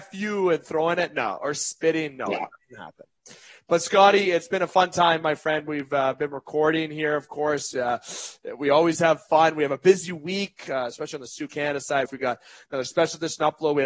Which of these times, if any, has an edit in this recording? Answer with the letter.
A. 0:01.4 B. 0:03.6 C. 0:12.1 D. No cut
C